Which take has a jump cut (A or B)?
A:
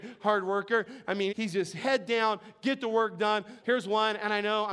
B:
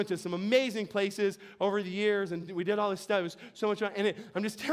A